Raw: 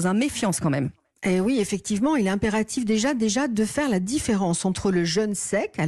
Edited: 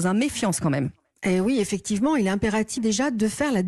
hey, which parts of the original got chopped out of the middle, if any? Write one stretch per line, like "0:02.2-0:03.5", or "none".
0:02.8-0:03.1